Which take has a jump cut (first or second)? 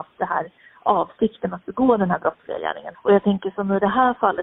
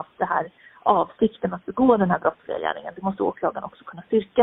first